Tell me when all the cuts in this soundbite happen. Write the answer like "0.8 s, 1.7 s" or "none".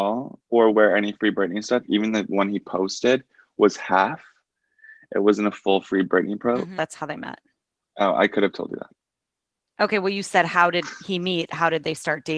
6.8 s

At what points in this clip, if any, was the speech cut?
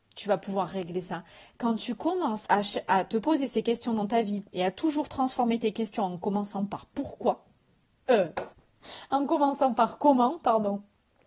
2.4 s, 8.5 s

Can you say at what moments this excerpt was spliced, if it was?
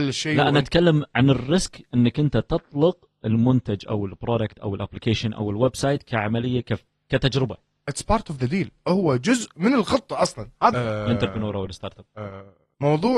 10.7 s

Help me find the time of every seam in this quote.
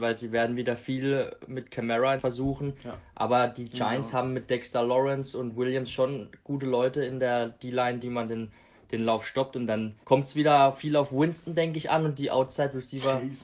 2.2 s, 8.0 s, 10.0 s

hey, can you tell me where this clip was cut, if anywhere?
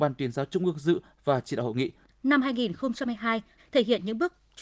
2.1 s, 3.6 s

